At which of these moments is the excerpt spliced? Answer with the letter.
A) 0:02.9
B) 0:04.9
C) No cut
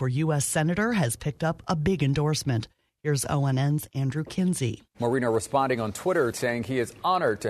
B